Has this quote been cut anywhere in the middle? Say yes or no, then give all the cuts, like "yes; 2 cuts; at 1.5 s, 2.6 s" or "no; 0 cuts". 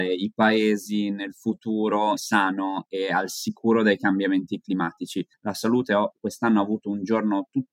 yes; 2 cuts; at 2.2 s, 5.3 s